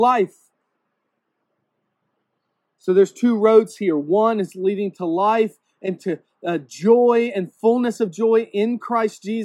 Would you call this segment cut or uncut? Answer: uncut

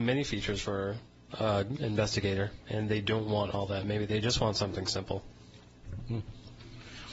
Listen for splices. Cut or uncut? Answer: uncut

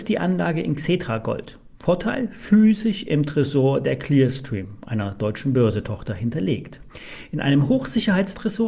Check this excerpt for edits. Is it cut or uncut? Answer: uncut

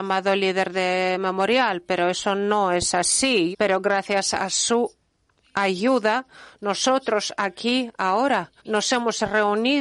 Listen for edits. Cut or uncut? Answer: cut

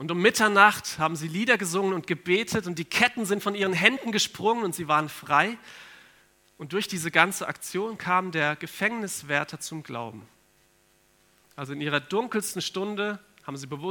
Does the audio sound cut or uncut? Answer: uncut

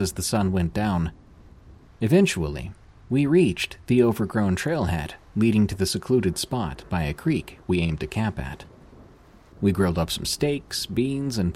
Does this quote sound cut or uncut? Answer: cut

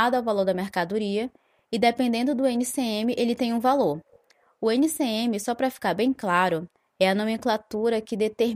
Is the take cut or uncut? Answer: uncut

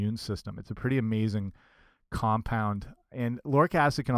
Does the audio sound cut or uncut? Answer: uncut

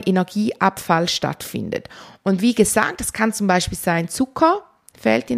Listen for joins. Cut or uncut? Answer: uncut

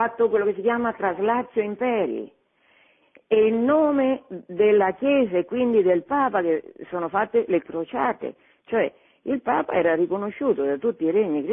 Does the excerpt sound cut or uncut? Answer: uncut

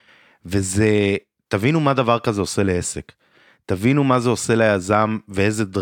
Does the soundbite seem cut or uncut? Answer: uncut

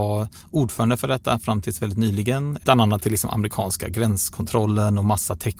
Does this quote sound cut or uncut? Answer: cut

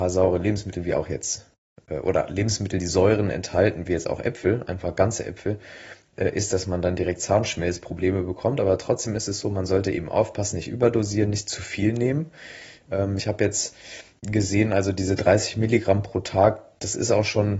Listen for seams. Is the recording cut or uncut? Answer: uncut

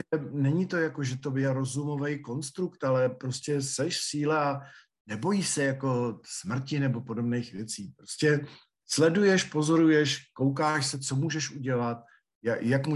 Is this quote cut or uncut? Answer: uncut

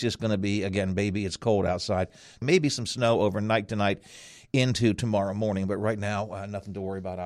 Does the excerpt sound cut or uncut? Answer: cut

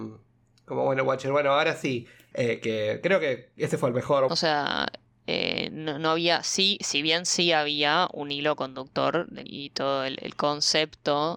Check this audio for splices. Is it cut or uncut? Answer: cut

